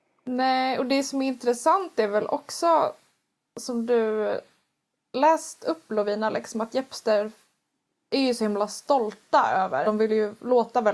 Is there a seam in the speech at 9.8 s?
yes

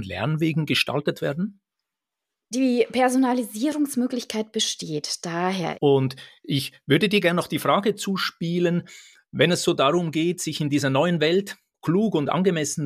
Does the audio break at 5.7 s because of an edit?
yes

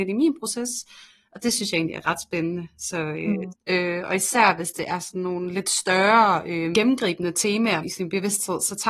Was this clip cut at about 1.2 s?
no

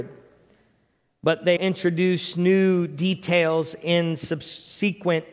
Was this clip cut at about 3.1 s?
no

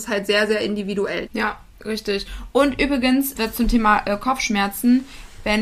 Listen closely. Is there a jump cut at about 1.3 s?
yes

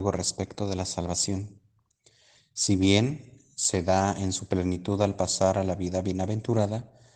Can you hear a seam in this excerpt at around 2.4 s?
yes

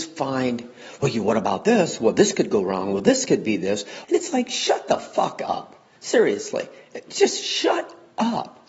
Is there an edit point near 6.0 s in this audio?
no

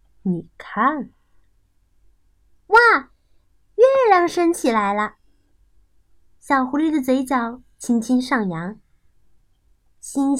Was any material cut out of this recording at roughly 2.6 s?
no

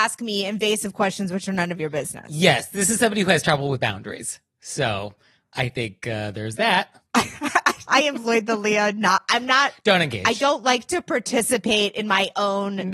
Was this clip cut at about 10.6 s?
no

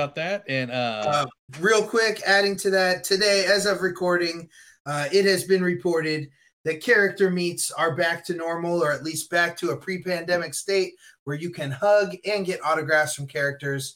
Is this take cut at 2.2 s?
no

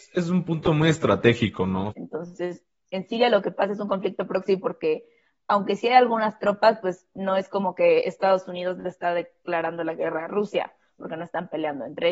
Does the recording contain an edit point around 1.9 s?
yes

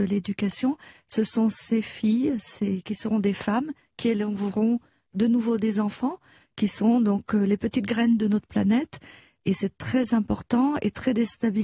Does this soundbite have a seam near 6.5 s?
no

